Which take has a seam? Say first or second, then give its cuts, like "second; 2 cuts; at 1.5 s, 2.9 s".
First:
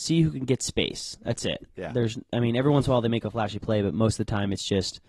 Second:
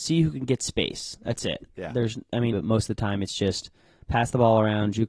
second; 1 cut; at 2.5 s